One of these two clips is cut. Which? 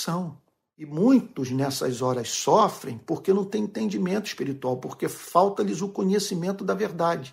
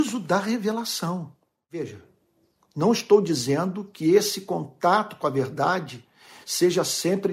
second; 1 cut; at 1.7 s

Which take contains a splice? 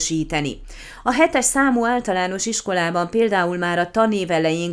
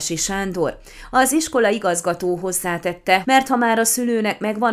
second; 1 cut; at 3.2 s

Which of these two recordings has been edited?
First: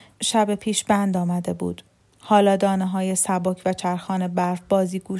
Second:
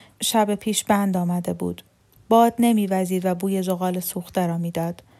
second; 1 cut; at 2.2 s

